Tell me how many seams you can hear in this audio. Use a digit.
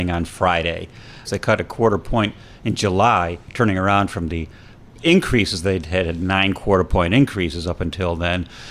1